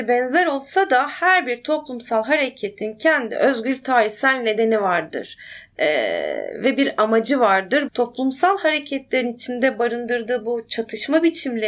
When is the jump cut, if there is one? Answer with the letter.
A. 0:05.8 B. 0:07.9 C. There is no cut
B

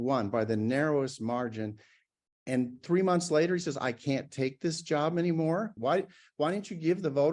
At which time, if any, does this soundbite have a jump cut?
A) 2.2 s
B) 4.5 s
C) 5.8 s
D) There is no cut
C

